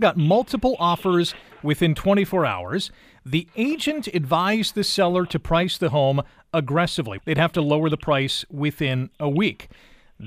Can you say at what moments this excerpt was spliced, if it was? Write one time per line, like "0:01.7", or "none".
0:07.2